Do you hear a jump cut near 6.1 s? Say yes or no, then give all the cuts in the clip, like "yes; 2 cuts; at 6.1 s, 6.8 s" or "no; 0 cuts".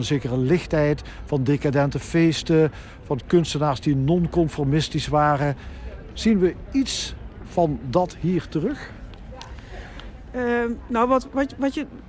no; 0 cuts